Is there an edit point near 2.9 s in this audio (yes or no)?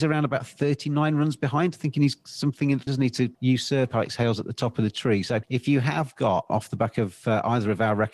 yes